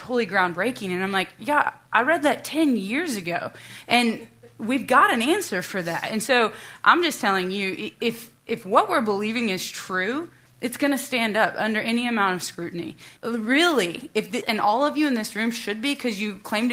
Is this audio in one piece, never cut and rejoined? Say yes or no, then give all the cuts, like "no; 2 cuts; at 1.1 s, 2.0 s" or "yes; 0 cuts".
no; 2 cuts; at 13.2 s, 14.4 s